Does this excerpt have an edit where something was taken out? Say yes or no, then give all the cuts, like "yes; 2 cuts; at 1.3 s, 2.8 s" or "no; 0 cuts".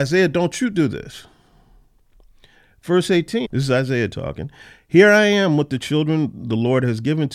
yes; 1 cut; at 3.4 s